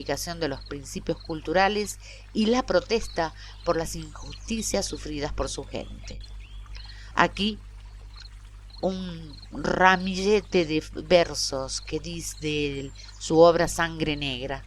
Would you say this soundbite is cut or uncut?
uncut